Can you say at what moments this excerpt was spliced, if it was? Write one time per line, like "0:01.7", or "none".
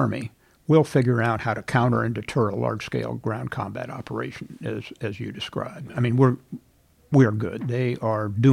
0:07.6